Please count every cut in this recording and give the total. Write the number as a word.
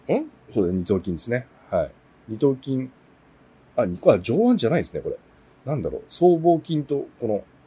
zero